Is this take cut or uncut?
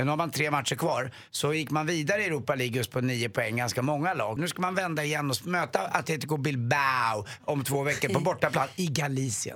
cut